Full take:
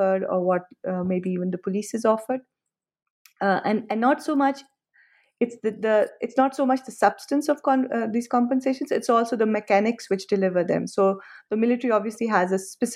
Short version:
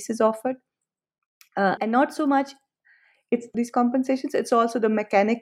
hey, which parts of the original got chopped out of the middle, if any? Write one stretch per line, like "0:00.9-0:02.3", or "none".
0:03.6-0:03.9
0:05.6-0:08.1